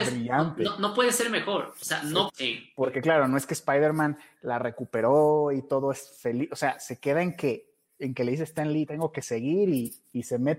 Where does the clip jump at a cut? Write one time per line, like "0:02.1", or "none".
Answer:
0:02.3
0:08.9